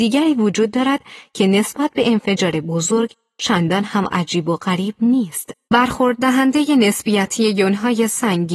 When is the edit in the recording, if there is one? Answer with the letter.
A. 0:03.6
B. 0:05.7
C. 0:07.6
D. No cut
B